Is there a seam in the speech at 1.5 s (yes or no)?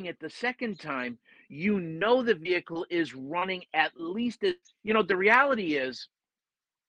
no